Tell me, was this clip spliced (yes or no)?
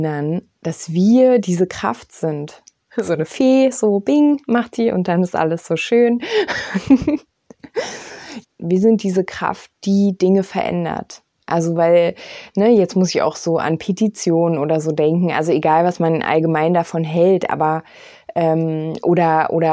yes